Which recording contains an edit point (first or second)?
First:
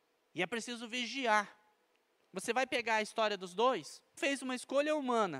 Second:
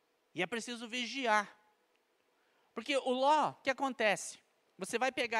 first